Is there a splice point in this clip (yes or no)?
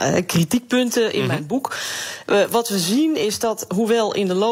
no